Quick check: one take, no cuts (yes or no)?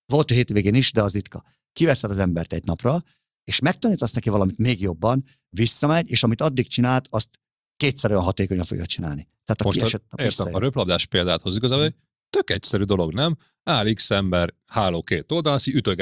yes